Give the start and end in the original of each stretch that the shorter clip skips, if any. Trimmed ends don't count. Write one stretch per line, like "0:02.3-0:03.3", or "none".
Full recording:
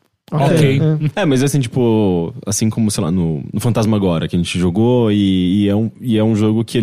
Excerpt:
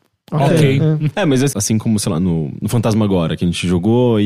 0:01.5-0:02.4